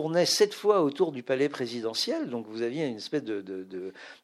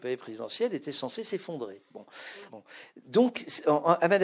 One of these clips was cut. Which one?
second; 1 cut; at 2.5 s

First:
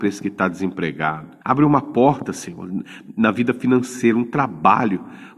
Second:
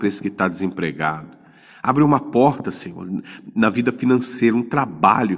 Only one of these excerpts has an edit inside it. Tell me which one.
first; 1 cut; at 1.4 s

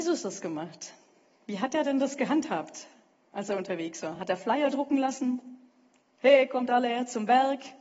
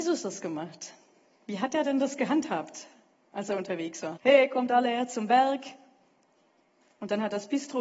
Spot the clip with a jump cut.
second; 1 cut; at 4.2 s

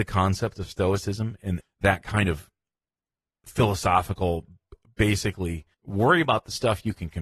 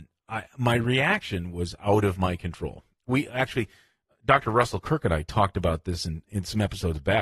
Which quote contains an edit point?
first; 2 cuts; at 1.6 s, 5.7 s

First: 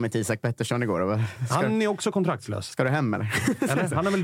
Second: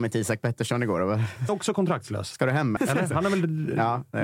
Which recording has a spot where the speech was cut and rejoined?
second; 2 cuts; at 1.5 s, 2.8 s

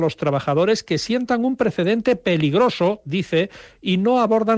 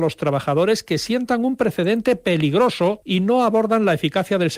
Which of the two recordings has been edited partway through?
second; 1 cut; at 3.0 s

